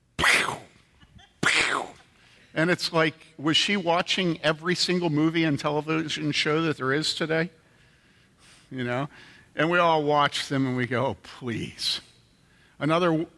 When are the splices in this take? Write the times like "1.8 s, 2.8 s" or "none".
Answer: none